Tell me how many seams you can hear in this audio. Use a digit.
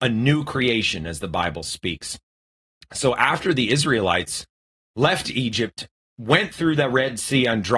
0